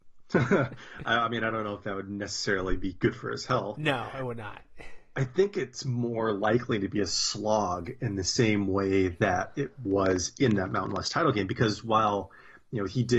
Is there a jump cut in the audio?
no; 0 cuts

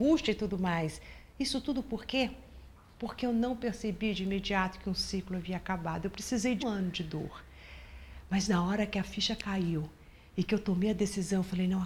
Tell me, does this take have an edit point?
yes; 1 cut; at 6.6 s

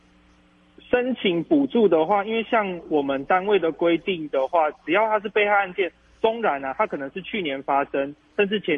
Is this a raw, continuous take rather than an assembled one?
yes; 0 cuts

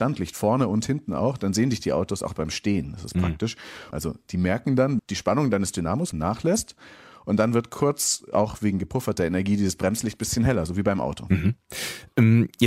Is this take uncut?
no; 3 cuts; at 3.9 s, 5.0 s, 6.1 s

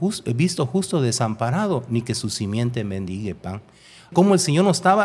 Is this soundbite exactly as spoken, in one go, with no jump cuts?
no; 1 cut; at 4.1 s

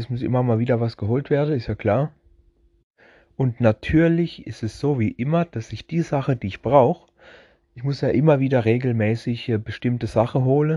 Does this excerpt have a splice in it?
no; 0 cuts

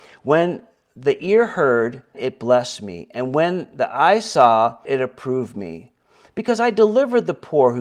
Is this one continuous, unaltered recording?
no; 2 cuts; at 2.1 s, 4.9 s

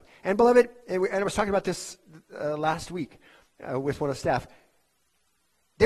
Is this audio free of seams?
yes; 0 cuts

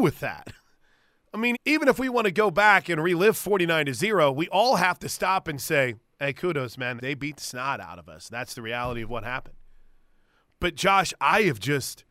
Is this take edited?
yes; 2 cuts; at 1.5 s, 7.0 s

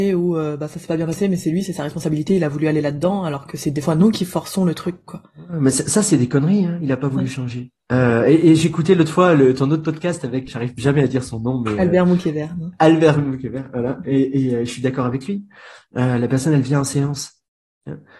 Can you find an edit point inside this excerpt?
yes; 1 cut; at 10.5 s

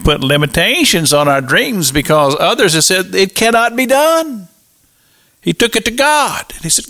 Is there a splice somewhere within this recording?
yes; 1 cut; at 5.3 s

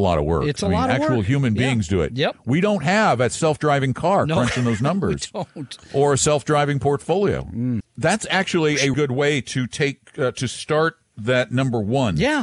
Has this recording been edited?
yes; 2 cuts; at 7.8 s, 8.9 s

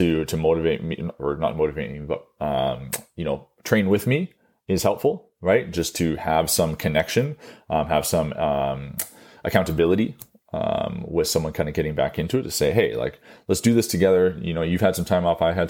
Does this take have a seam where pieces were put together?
no; 0 cuts

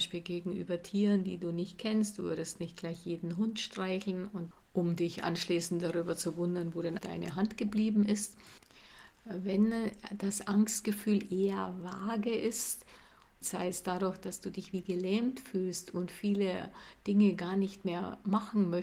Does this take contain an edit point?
yes; 2 cuts; at 7.0 s, 13.4 s

